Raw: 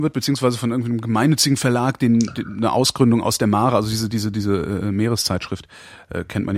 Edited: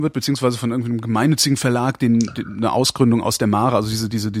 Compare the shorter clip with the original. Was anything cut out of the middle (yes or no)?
no